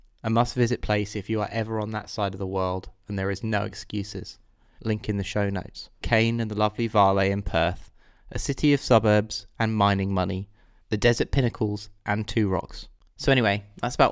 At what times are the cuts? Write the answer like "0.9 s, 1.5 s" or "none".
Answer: 4.8 s, 6.0 s, 10.8 s